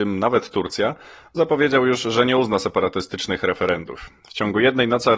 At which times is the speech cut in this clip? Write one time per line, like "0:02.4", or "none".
0:04.2